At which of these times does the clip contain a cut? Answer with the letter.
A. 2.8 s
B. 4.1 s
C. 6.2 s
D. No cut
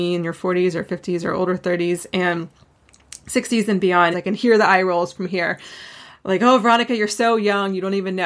B